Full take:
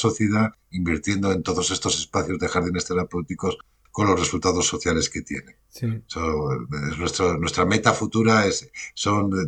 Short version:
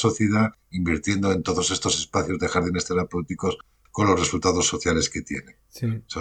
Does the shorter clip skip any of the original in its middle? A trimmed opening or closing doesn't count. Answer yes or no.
no